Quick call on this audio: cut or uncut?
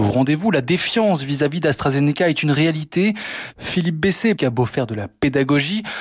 cut